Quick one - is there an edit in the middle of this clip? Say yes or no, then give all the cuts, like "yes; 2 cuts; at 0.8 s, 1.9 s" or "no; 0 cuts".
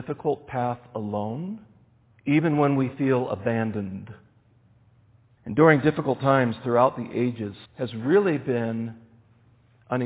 yes; 3 cuts; at 2.1 s, 5.4 s, 7.7 s